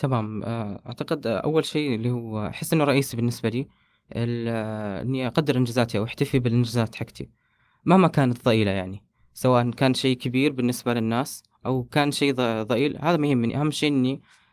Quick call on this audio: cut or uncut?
uncut